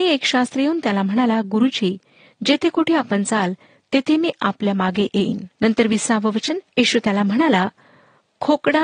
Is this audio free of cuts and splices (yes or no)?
no